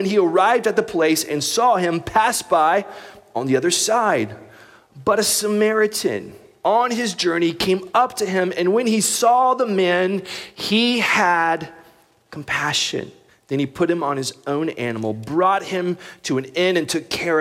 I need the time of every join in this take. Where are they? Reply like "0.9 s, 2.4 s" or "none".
13.3 s